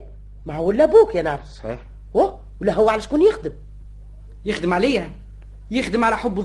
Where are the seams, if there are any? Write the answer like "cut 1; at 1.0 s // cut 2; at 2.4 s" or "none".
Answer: none